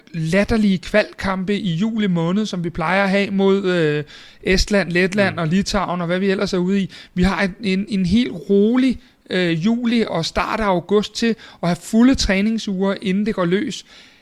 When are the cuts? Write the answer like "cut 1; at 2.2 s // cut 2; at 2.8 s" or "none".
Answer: cut 1; at 10.1 s